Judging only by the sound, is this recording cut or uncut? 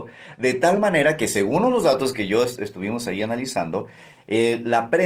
uncut